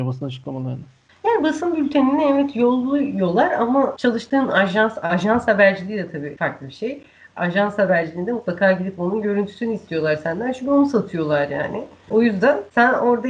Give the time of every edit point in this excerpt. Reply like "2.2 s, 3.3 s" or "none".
none